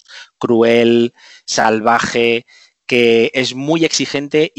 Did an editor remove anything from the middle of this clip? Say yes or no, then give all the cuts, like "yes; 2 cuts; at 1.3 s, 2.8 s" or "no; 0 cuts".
no; 0 cuts